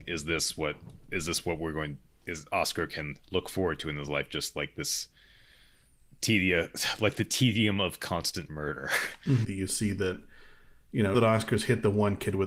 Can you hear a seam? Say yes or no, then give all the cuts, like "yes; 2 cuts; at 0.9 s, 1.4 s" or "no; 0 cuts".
yes; 2 cuts; at 9.4 s, 11.1 s